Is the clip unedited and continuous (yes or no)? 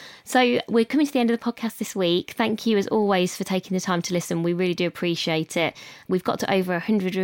yes